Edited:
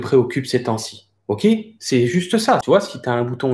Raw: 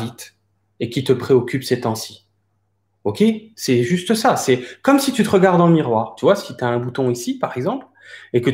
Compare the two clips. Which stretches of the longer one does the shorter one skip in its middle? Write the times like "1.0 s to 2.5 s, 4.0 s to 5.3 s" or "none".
2.4 s to 2.9 s, 4.4 s to 6.2 s